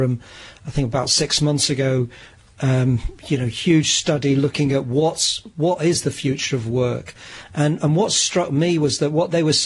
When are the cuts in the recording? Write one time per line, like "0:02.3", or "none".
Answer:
none